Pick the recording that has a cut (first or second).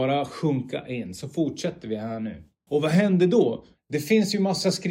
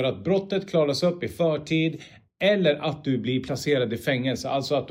first